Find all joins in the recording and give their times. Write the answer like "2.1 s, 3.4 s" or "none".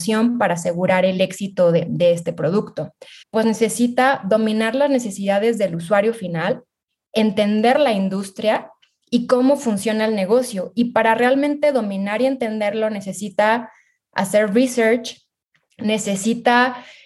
3.2 s